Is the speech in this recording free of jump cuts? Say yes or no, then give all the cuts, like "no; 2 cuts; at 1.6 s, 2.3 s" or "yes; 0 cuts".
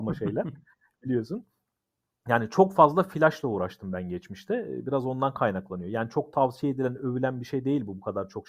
yes; 0 cuts